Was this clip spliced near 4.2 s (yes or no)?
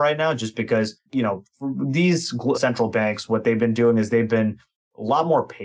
no